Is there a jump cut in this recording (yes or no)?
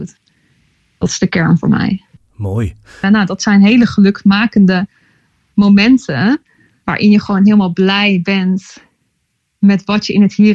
yes